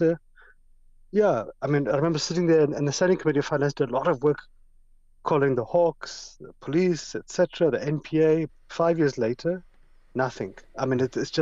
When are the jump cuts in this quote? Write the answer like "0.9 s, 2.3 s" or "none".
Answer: 8.5 s